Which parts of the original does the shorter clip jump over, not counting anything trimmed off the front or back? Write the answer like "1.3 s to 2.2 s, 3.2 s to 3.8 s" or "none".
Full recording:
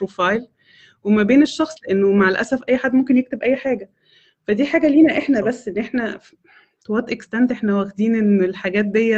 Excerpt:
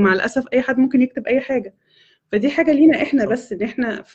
none